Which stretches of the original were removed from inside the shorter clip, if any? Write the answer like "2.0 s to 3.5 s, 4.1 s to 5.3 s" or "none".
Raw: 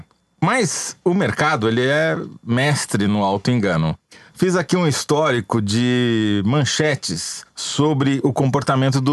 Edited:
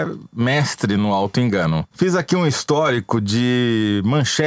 4.0 s to 4.3 s